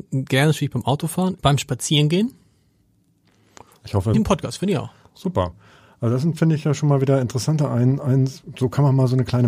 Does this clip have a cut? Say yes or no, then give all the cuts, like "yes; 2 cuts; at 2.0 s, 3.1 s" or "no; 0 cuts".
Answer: yes; 2 cuts; at 1.4 s, 4.1 s